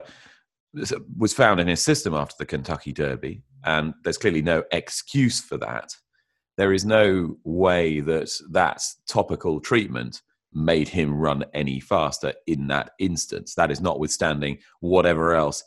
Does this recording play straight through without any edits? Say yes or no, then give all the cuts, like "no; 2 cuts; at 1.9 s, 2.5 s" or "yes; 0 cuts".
yes; 0 cuts